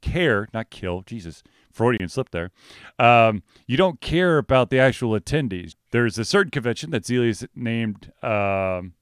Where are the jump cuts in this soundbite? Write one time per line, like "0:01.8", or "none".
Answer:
0:05.7